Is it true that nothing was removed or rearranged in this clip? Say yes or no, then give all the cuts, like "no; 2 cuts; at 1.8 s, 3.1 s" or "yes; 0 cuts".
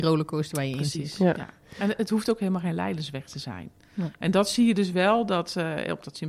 yes; 0 cuts